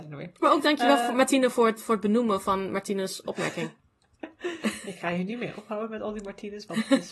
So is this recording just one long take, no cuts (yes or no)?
yes